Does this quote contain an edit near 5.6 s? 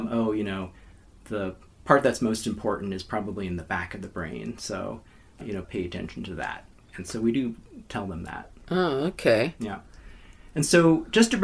yes; 1 cut; at 5.6 s

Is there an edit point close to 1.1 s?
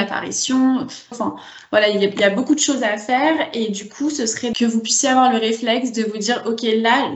yes; 1 cut; at 1.1 s

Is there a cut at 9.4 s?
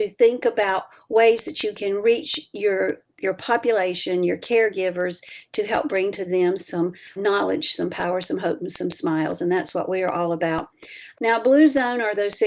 no; 2 cuts; at 7.2 s, 11.1 s

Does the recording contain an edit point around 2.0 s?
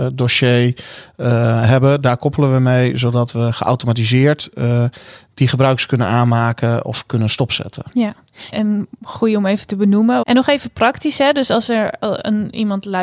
no; 2 cuts; at 8.5 s, 10.2 s

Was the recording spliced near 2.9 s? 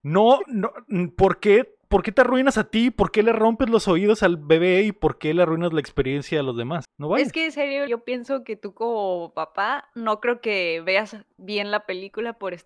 no; 2 cuts; at 6.8 s, 7.9 s

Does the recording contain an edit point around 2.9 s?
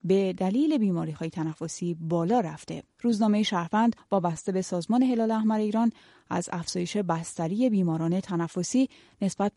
yes; 1 cut; at 2.9 s

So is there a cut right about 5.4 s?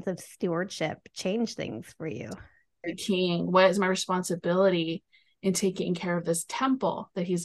no; 1 cut; at 2.8 s

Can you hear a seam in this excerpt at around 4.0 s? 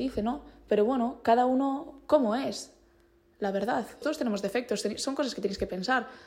yes; 1 cut; at 4.0 s

